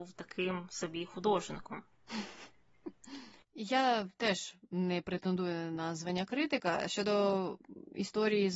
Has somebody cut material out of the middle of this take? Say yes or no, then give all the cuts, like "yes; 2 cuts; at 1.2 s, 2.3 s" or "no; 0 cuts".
no; 0 cuts